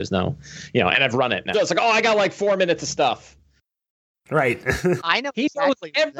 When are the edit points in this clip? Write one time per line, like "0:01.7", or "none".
0:01.5
0:05.0